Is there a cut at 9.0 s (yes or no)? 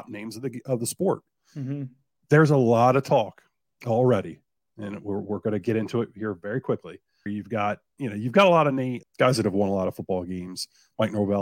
yes